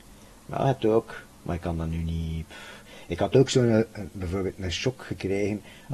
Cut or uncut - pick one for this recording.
uncut